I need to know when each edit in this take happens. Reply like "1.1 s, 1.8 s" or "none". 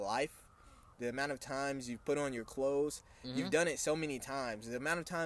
0.9 s